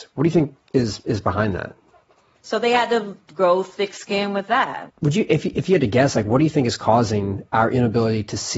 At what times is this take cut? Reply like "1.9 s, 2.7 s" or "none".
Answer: 2.4 s, 4.9 s